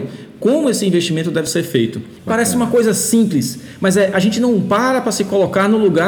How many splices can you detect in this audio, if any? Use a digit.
1